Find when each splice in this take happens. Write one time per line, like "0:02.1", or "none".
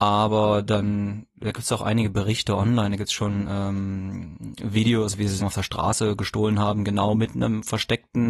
0:05.4